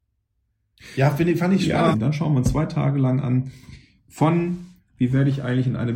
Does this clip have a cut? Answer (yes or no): yes